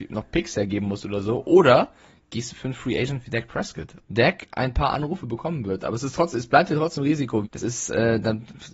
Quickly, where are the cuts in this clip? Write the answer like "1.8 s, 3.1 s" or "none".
4.0 s, 7.4 s